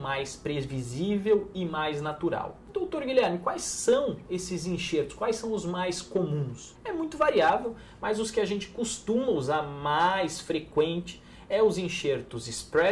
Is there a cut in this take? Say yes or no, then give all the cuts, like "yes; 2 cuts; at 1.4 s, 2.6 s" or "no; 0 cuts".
no; 0 cuts